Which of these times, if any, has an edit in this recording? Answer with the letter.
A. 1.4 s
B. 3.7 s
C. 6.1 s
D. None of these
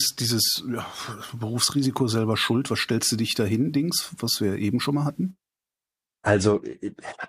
C